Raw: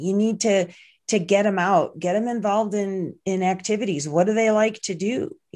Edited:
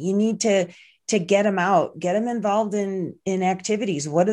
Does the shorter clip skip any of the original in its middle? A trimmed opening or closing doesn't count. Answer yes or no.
no